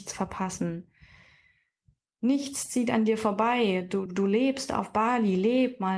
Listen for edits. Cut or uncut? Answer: cut